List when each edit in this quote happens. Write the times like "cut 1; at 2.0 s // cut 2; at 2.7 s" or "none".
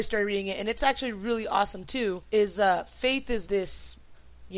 cut 1; at 2.3 s // cut 2; at 3.4 s

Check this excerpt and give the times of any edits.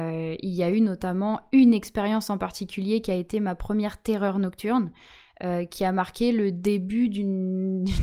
none

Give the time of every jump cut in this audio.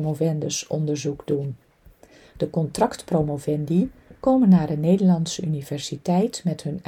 none

